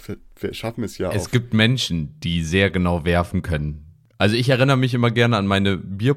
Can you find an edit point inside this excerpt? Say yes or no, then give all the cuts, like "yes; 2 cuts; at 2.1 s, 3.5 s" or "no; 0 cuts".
no; 0 cuts